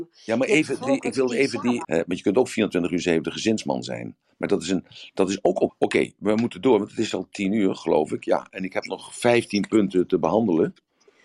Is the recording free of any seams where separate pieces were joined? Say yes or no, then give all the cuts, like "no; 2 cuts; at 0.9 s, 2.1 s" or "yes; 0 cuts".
no; 2 cuts; at 1.8 s, 5.7 s